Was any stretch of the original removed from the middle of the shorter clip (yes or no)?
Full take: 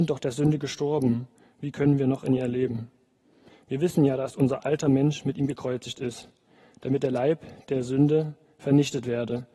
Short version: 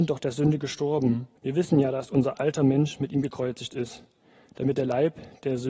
yes